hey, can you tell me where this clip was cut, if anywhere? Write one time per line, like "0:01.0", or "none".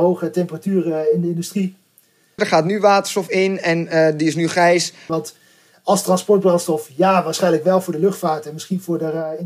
0:02.4
0:05.1